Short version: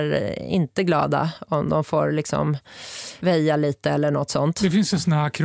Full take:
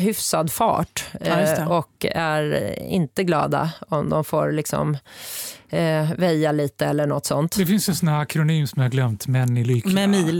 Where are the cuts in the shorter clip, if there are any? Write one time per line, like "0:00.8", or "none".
0:03.2